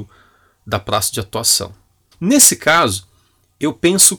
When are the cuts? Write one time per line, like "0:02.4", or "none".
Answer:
0:02.1